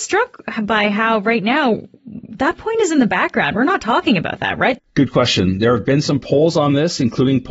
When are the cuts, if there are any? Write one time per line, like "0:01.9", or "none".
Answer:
0:04.8